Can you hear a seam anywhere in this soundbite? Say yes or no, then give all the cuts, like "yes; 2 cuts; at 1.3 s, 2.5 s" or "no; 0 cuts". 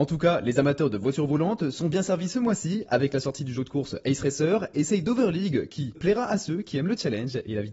yes; 1 cut; at 5.9 s